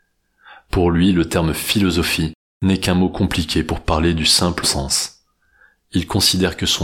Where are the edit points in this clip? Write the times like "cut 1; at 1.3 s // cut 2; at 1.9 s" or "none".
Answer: cut 1; at 4.6 s